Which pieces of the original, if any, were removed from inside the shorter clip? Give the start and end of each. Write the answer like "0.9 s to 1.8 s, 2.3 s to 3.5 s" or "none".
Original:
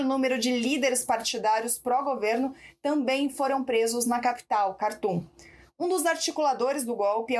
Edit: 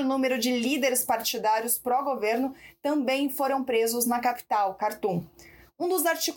none